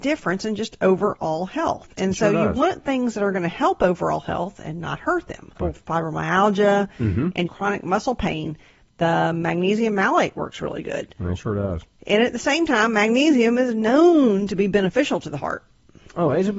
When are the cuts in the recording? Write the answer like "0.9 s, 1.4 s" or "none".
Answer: 5.6 s, 7.5 s